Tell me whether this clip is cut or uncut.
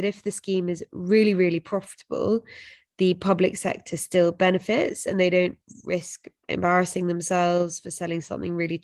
uncut